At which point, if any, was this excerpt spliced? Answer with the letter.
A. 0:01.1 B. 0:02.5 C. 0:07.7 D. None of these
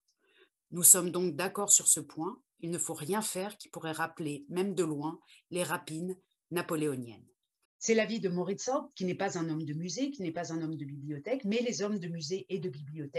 C